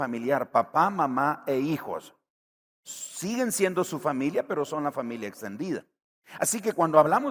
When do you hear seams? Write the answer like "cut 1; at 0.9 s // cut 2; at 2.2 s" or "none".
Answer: cut 1; at 2.7 s